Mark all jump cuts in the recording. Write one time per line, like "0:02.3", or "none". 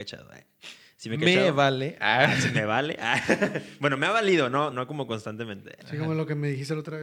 0:04.7